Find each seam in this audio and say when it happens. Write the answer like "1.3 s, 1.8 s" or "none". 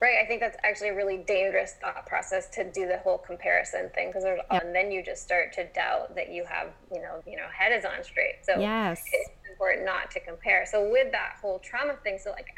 4.6 s, 7.2 s